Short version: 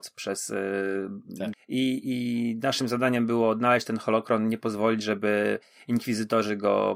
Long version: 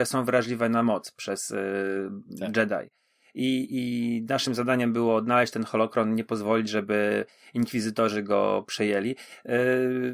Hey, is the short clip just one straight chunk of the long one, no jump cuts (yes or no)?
no